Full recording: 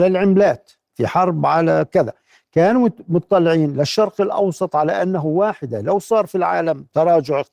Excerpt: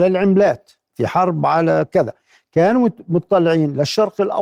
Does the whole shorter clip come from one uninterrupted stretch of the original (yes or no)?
yes